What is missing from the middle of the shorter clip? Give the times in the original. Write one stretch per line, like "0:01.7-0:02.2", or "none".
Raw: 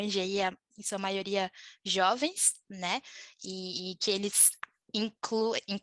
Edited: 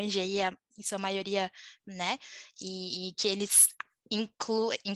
0:01.8-0:02.6